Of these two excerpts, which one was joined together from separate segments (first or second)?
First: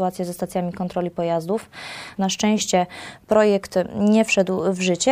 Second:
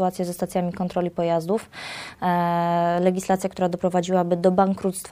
first